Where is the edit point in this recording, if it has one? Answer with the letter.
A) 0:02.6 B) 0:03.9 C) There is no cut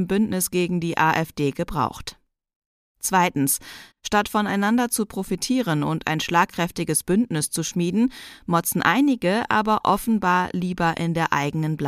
B